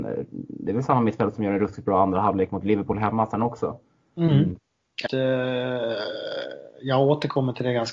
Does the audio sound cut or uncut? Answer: cut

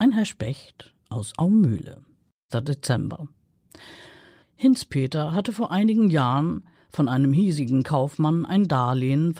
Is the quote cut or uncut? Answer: cut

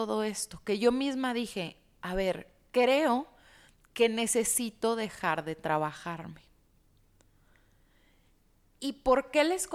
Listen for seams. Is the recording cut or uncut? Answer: uncut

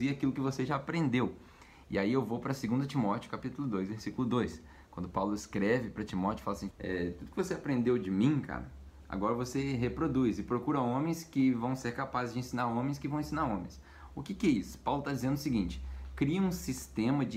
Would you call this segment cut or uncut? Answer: cut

